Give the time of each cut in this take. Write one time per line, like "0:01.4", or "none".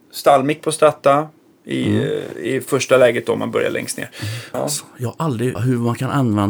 0:04.5
0:05.6